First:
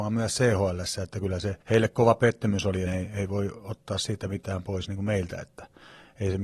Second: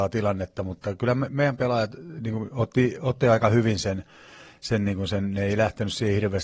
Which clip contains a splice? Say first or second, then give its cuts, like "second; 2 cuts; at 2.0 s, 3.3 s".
first; 2 cuts; at 1.6 s, 2.9 s